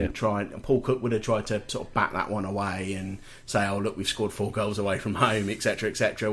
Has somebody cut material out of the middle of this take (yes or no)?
no